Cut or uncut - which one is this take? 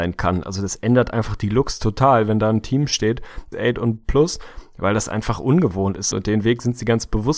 cut